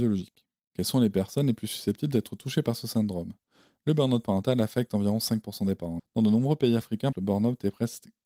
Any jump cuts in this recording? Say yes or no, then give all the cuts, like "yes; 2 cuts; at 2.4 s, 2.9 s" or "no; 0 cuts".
yes; 2 cuts; at 6.0 s, 7.1 s